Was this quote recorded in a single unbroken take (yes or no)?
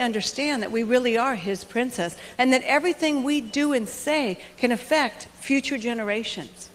no